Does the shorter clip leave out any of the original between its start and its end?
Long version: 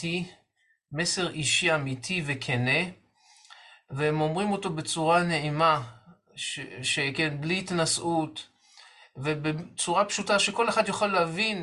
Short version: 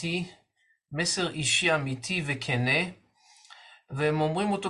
no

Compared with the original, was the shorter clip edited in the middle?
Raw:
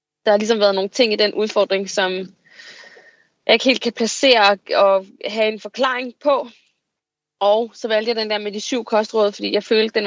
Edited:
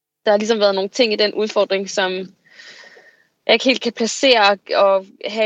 no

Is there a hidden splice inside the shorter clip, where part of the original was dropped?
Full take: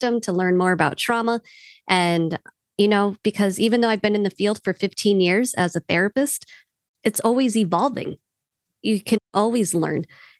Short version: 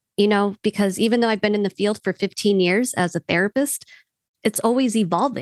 no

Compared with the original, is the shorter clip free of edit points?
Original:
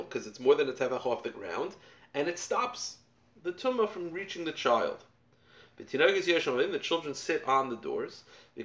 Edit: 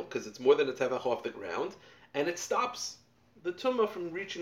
yes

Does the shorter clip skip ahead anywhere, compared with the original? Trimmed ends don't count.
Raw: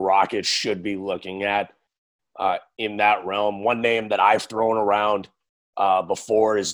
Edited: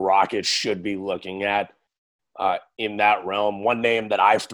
no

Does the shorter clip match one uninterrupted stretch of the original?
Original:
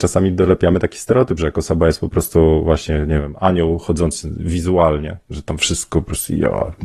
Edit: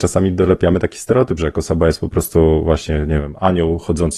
yes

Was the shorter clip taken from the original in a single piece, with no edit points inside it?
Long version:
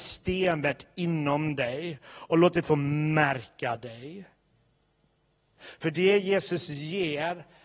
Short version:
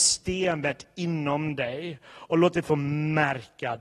yes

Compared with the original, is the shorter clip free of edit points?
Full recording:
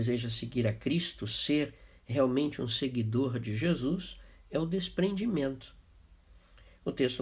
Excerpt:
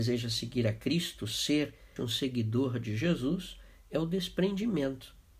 no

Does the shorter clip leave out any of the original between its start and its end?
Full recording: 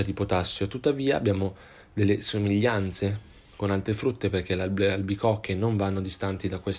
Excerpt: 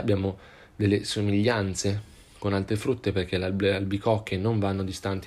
no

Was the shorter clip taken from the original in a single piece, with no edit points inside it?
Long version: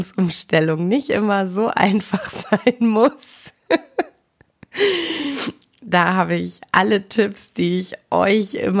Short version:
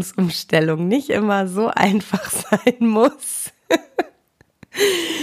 yes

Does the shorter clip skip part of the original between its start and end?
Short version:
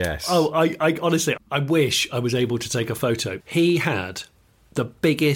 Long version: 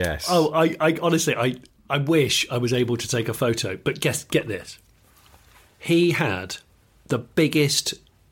yes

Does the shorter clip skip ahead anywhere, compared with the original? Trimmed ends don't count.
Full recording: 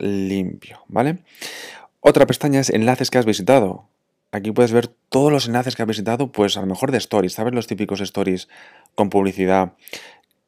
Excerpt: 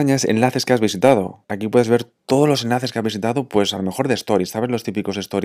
yes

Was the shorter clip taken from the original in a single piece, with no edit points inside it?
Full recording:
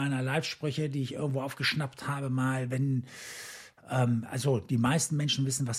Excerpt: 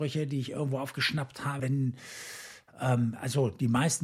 no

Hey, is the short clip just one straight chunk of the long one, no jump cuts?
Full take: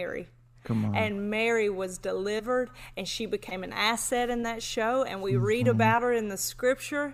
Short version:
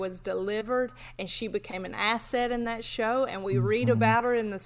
yes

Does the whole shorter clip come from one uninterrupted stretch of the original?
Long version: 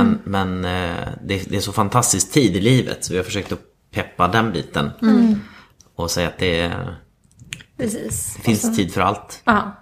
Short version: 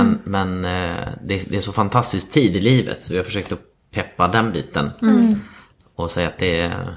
yes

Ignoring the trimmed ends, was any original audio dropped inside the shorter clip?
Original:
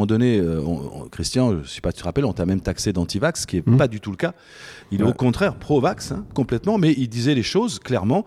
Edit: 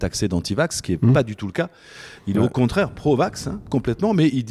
no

